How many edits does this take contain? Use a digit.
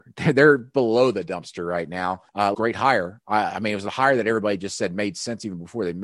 1